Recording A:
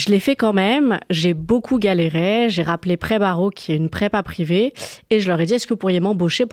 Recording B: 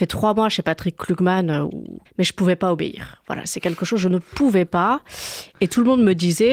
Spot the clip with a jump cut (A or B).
B